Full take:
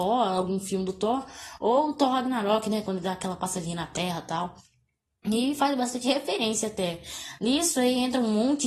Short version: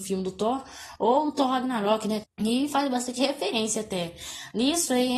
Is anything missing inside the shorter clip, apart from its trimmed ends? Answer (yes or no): yes